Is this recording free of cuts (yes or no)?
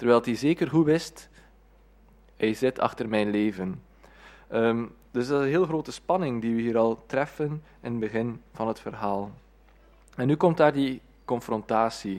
yes